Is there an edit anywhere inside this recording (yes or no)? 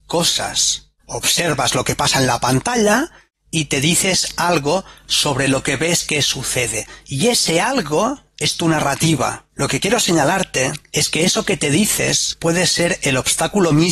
no